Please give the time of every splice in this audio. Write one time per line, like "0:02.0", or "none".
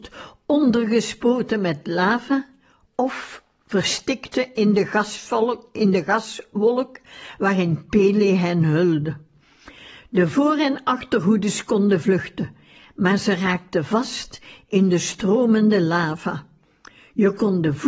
none